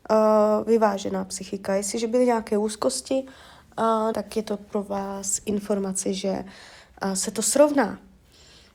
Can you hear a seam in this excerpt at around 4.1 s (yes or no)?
yes